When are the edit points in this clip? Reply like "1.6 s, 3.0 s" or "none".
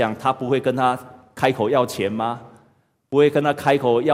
none